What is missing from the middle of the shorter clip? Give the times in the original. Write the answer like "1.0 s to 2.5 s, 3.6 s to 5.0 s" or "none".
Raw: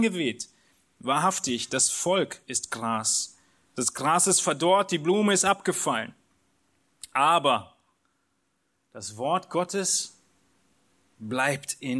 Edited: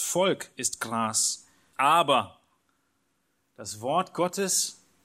3.6 s to 7.1 s